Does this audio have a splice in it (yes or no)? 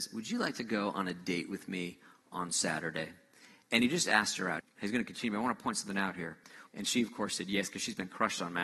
yes